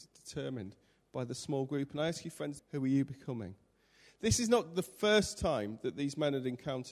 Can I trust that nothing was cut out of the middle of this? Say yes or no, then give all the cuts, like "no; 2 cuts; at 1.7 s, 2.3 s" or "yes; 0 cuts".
no; 1 cut; at 2.6 s